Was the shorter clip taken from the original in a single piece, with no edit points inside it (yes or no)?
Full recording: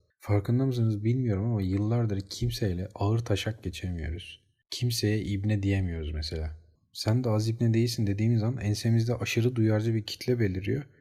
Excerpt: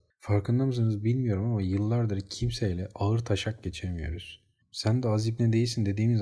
no